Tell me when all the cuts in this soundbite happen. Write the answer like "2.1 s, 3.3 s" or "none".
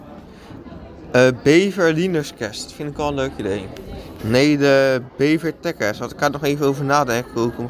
4.2 s